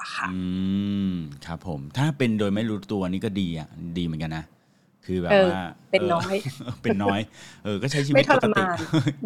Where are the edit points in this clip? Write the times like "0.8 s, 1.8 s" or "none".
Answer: none